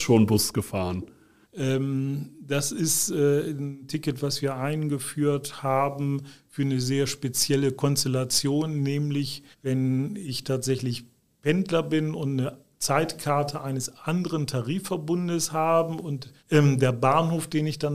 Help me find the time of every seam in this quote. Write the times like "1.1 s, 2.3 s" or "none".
1.4 s, 9.5 s, 16.4 s